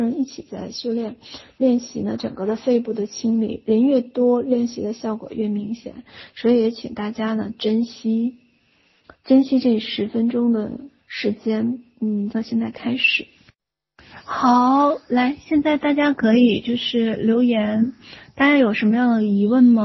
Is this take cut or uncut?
cut